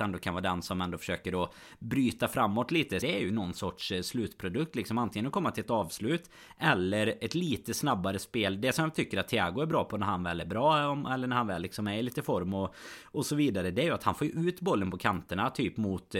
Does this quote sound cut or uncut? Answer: cut